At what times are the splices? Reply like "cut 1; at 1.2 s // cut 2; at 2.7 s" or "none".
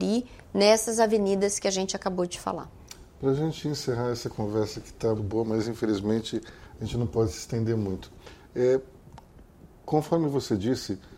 cut 1; at 5.2 s

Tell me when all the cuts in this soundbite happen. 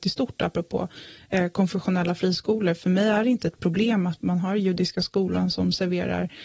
none

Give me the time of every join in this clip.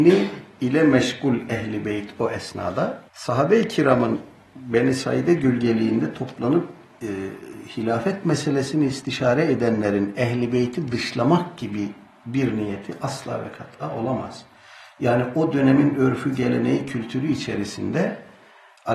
cut 1; at 3.1 s

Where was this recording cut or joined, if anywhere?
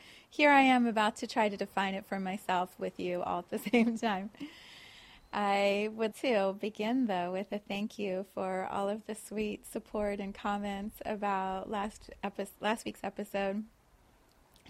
cut 1; at 6.1 s

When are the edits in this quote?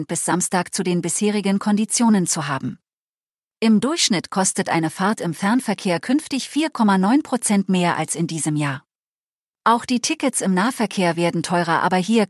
none

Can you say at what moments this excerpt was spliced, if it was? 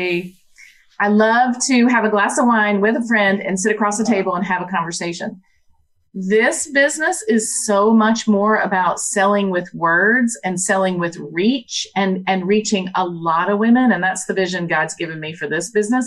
none

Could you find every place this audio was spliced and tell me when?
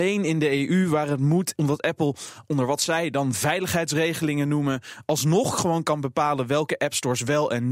cut 1; at 1.6 s

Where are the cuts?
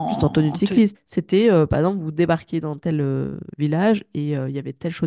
cut 1; at 0.9 s // cut 2; at 2.8 s

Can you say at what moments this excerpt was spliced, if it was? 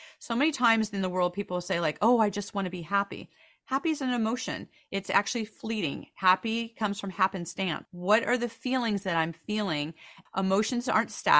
cut 1; at 7.9 s // cut 2; at 10.3 s

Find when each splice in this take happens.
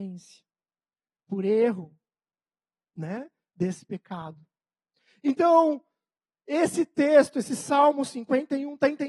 none

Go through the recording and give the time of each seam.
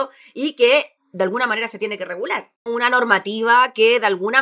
cut 1; at 2.7 s

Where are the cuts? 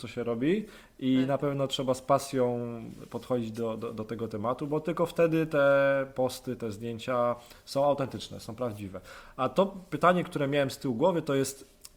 none

